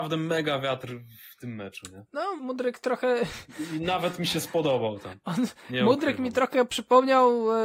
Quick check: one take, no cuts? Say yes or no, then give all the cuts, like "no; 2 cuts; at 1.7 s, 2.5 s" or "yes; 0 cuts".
no; 1 cut; at 2.4 s